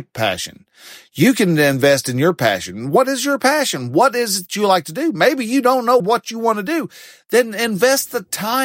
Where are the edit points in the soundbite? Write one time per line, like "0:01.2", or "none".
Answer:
0:06.0

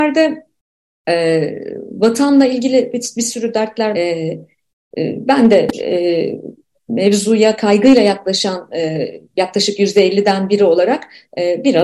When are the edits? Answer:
0:03.9

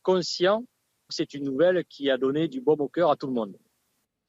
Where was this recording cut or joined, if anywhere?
0:01.1

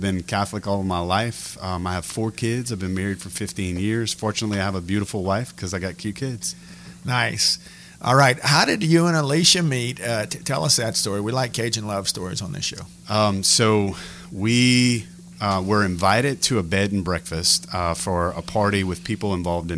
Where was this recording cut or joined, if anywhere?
none

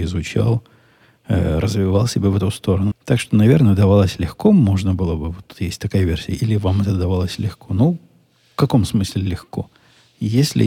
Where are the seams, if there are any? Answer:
0:02.9

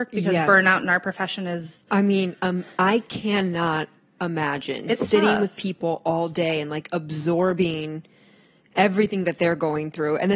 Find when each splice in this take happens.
0:02.4

